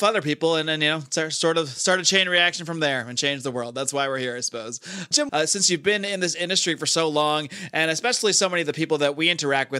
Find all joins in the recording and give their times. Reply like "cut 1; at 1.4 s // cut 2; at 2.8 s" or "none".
cut 1; at 5.3 s